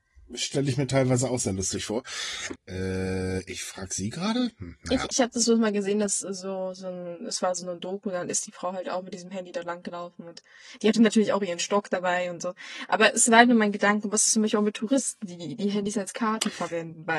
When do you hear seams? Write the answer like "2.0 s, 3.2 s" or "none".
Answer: 2.6 s, 5.1 s